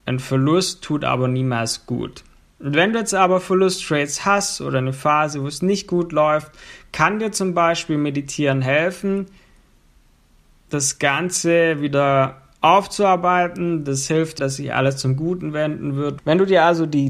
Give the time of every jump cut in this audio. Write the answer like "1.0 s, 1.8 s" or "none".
14.4 s, 16.2 s